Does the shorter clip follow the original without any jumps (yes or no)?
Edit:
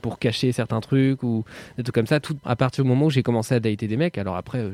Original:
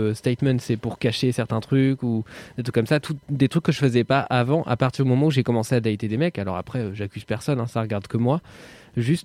no